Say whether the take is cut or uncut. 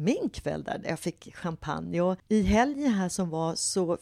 uncut